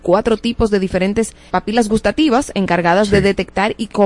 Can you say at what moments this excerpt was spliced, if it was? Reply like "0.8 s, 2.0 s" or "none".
1.5 s